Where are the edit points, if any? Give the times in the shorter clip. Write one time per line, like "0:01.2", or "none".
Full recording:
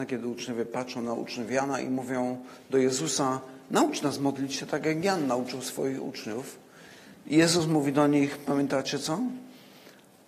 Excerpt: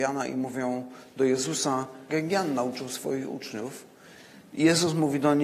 0:02.1